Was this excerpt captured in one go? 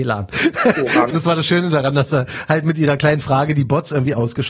no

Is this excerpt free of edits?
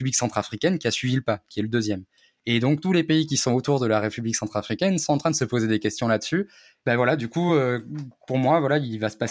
yes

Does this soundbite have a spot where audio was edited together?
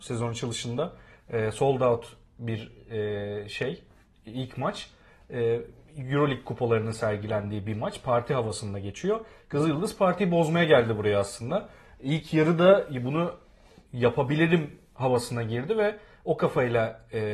no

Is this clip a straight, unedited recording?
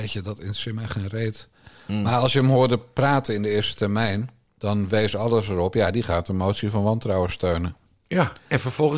yes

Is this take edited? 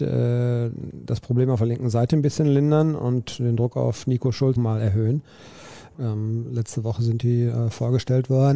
yes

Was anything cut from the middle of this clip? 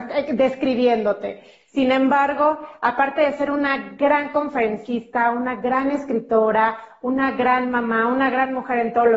no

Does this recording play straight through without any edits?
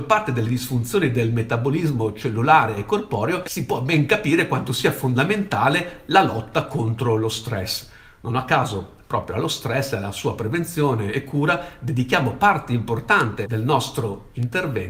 yes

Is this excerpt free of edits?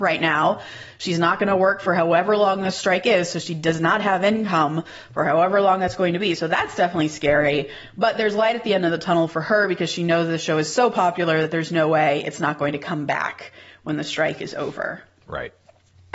yes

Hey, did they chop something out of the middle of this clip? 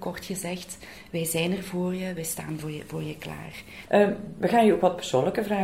yes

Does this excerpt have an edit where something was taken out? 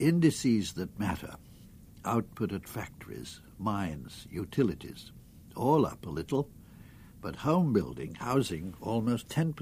no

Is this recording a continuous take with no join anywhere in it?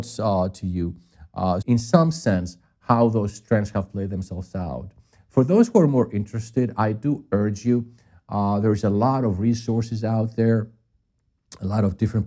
no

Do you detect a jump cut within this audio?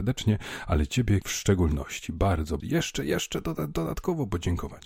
yes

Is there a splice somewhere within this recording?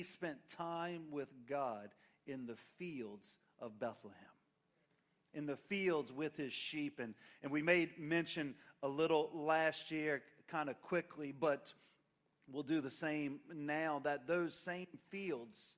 no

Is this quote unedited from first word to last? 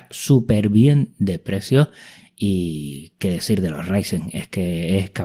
yes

